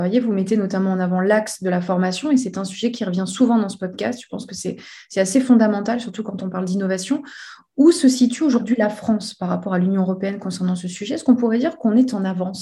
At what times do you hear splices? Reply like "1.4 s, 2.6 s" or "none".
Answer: none